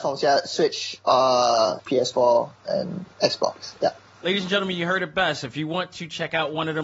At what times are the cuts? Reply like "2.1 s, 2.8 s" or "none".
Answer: 1.8 s

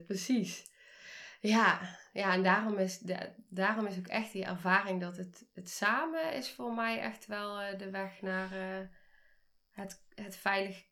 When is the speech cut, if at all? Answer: none

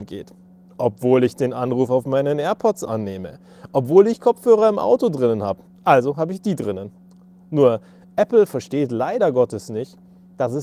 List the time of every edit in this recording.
5.7 s

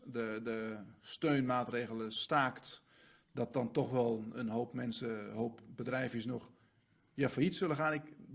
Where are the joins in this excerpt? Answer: none

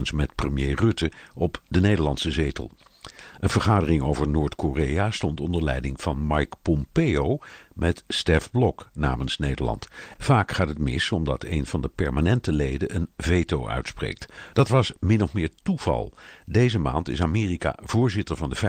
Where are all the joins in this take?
10.2 s, 14.5 s

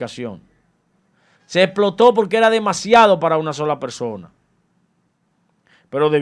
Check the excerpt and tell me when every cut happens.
1.4 s

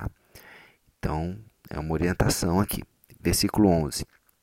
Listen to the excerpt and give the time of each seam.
none

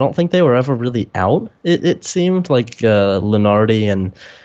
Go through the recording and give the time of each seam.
none

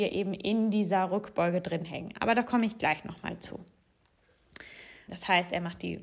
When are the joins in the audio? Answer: 5.1 s

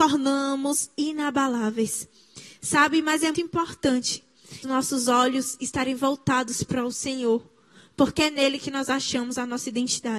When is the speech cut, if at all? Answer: 3.3 s, 4.6 s

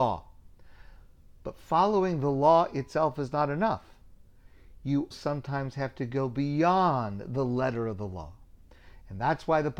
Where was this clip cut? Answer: 5.1 s

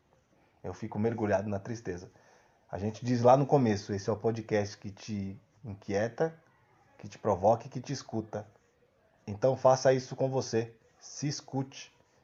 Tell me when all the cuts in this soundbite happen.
none

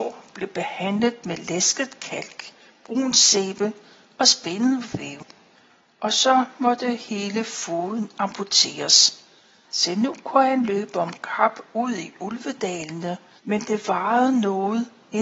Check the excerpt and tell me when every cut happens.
9.6 s, 13.4 s

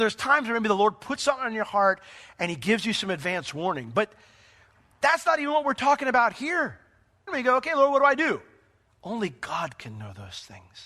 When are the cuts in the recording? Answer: 7.3 s, 8.9 s

